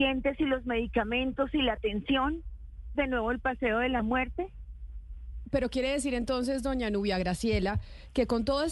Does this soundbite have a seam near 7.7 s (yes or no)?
no